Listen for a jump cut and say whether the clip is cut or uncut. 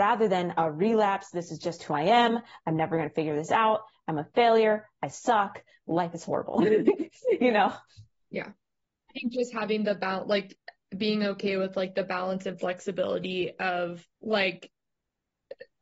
cut